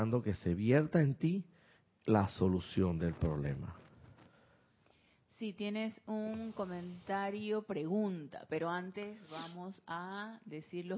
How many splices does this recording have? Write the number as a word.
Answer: zero